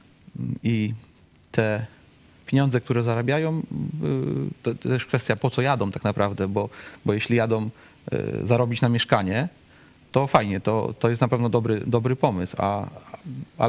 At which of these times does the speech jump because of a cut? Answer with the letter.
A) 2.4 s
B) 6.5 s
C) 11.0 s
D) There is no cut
C